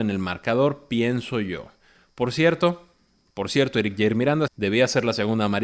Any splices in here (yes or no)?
yes